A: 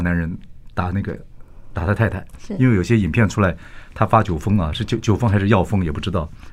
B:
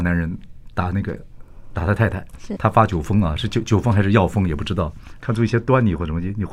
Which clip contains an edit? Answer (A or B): B